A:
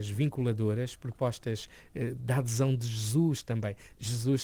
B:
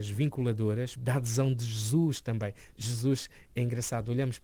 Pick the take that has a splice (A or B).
B